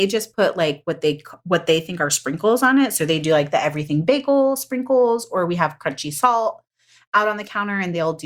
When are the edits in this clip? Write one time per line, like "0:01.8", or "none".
none